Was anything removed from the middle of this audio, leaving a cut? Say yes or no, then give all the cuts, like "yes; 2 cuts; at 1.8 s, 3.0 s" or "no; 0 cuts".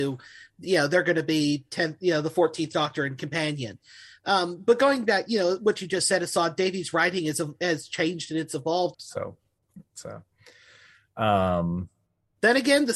yes; 1 cut; at 8.9 s